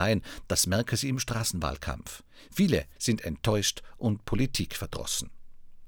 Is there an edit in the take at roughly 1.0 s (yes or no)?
no